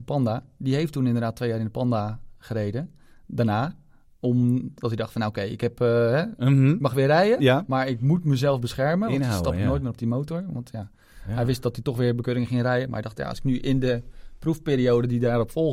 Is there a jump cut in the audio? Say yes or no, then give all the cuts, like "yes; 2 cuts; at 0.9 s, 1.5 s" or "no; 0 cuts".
no; 0 cuts